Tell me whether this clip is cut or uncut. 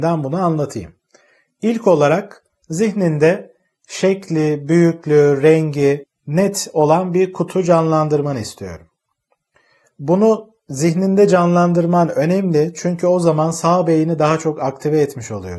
uncut